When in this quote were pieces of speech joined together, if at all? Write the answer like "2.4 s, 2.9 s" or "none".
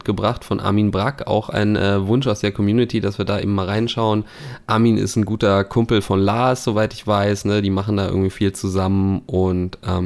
none